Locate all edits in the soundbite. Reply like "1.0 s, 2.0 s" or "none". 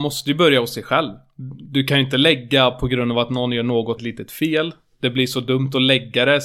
4.0 s